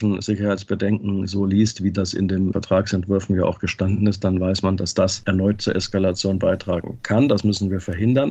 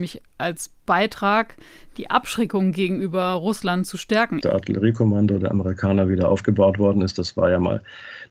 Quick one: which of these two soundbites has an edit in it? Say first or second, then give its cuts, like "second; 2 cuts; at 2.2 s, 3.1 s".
second; 1 cut; at 4.4 s